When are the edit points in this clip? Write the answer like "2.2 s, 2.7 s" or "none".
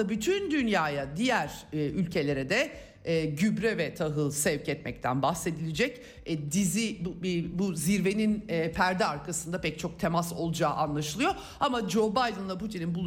none